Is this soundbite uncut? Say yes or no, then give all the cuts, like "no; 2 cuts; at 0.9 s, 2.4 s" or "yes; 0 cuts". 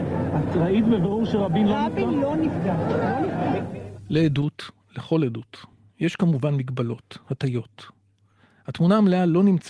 yes; 0 cuts